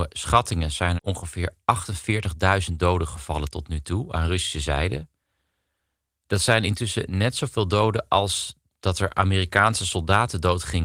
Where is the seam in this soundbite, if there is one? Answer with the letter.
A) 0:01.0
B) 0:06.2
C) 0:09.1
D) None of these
A